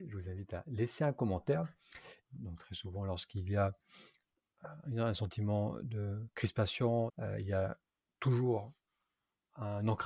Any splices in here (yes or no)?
yes